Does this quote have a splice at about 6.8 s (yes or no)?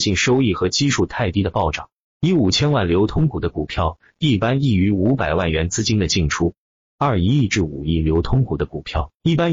no